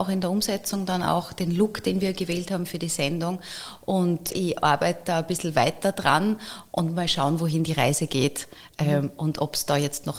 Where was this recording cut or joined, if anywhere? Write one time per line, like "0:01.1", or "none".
0:04.3

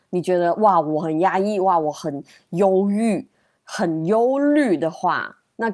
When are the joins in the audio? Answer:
none

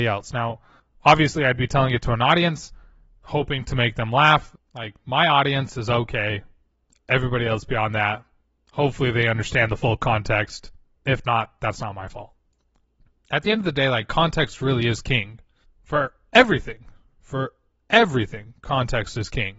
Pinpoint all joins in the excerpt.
0:04.6

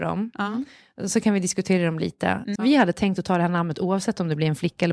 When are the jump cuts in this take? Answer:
0:02.6

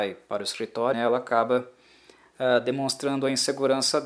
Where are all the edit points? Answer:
0:00.9

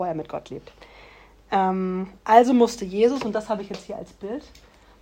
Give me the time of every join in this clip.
0:02.2

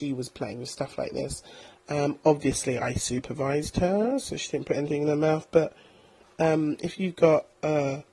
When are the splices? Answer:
none

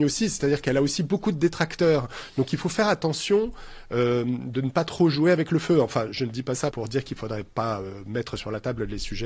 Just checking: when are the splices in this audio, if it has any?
0:06.7

